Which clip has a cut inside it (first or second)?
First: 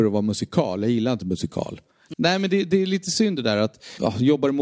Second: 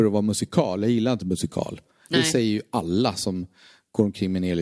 first